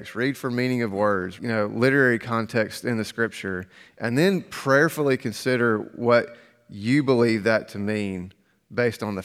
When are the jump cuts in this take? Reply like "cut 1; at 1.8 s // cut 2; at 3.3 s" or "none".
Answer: cut 1; at 1.4 s